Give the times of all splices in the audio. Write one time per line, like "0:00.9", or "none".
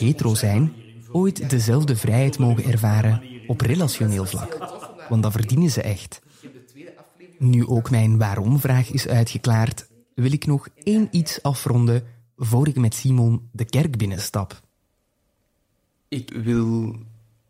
0:16.3